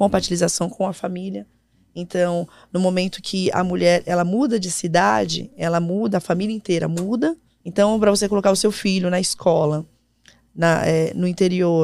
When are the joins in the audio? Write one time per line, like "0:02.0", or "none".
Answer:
0:07.6